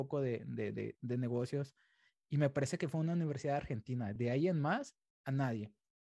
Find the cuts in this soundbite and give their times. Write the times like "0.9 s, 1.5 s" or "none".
none